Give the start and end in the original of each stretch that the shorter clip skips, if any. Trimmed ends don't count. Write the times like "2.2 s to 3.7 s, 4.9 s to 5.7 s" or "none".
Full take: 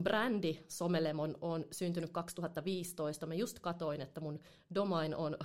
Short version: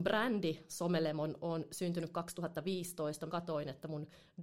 3.3 s to 3.6 s